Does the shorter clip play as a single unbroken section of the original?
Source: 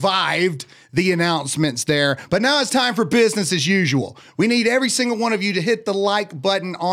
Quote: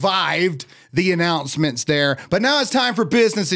yes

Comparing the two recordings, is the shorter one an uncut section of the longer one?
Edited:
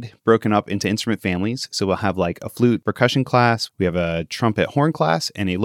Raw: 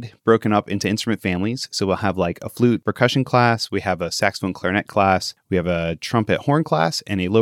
no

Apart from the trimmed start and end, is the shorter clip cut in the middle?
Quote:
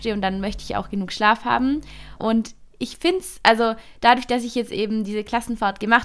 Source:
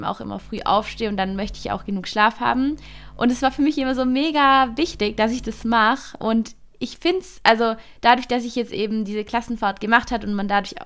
yes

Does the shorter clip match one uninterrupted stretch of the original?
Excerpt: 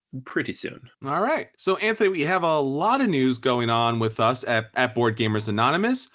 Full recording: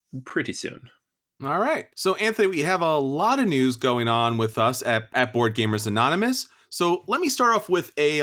no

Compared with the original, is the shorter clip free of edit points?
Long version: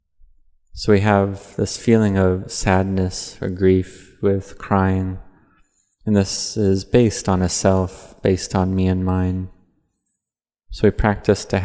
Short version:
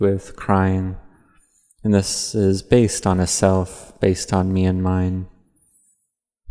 yes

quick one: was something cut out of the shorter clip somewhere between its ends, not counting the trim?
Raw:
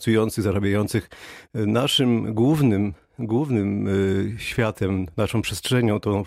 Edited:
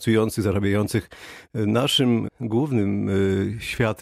yes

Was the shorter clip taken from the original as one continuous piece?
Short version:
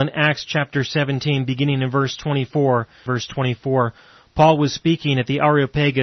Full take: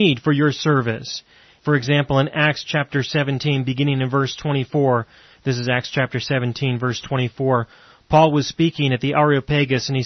no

